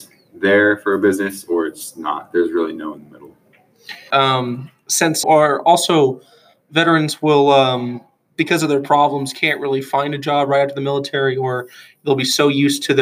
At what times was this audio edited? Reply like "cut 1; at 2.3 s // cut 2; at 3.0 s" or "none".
cut 1; at 4.1 s // cut 2; at 5.2 s